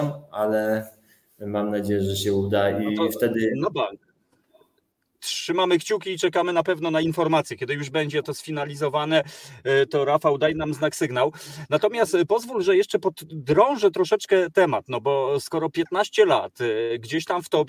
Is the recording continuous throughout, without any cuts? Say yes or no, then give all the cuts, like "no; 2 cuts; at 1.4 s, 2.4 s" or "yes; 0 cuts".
yes; 0 cuts